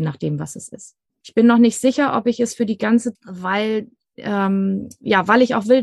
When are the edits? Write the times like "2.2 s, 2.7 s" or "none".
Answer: 1.2 s, 3.2 s